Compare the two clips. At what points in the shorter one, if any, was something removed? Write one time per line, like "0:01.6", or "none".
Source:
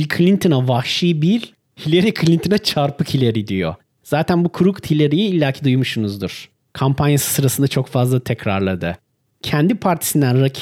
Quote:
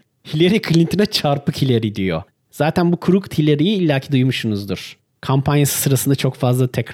none